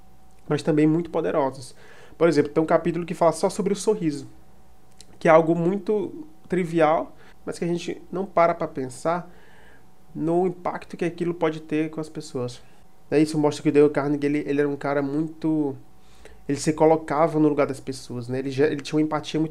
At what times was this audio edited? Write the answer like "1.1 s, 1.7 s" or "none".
none